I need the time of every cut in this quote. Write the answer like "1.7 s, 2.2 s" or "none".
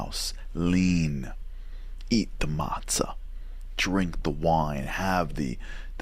none